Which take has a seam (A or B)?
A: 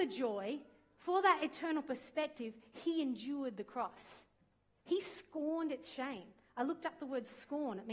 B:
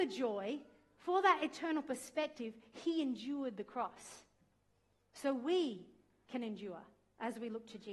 A